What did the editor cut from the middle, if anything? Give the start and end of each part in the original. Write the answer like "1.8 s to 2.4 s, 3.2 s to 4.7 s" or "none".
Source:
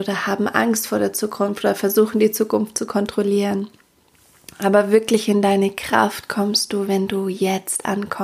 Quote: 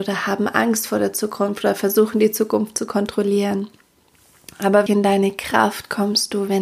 4.9 s to 5.3 s